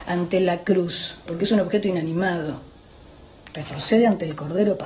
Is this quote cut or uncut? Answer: cut